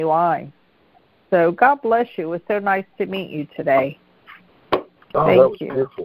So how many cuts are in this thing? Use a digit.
0